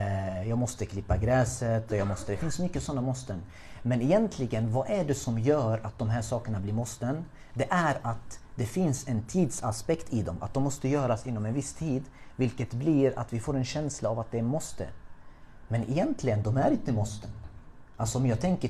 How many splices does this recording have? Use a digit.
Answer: 1